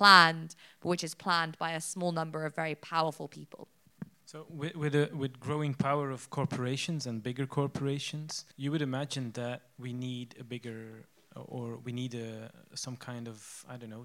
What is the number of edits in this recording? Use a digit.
2